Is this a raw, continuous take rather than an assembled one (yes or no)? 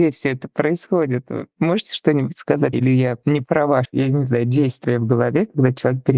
no